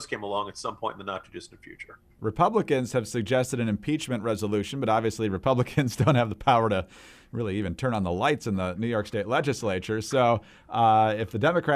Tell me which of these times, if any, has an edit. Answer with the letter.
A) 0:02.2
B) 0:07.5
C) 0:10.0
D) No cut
A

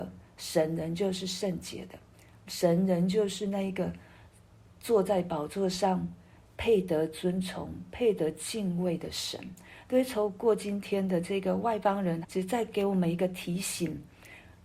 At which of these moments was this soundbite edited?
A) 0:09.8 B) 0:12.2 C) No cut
B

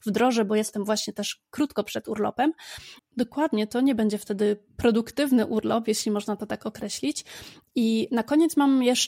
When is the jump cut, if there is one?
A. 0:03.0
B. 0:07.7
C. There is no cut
A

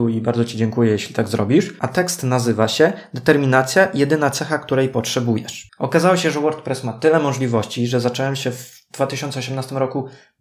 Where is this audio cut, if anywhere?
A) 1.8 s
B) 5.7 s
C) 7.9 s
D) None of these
B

